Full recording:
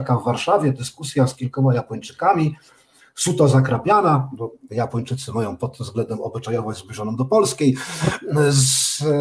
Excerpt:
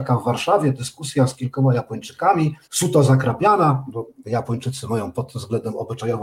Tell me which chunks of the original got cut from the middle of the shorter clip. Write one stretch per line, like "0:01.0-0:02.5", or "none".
0:02.6-0:03.1